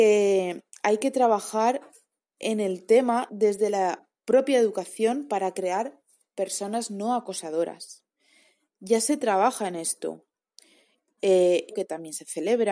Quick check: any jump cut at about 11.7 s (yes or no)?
yes